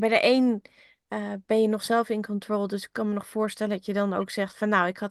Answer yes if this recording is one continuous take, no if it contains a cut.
yes